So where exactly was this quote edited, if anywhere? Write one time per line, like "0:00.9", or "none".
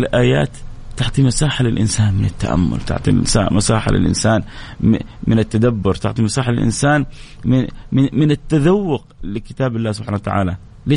none

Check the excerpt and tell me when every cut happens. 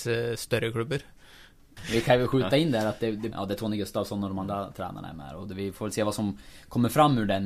0:01.8
0:03.3

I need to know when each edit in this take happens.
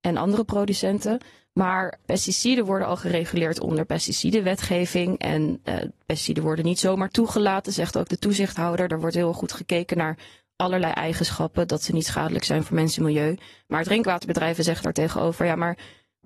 none

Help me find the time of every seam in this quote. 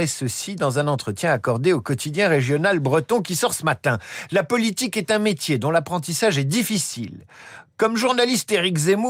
none

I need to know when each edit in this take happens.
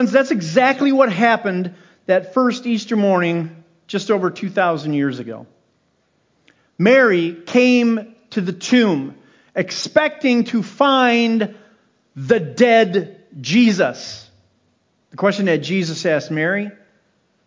0:15.0

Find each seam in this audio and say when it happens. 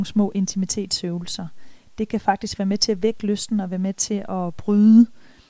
none

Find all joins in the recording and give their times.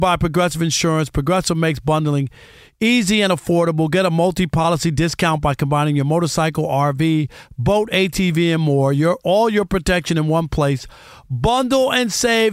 none

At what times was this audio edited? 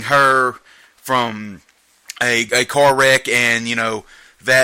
none

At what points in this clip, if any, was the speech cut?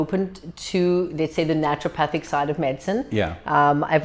none

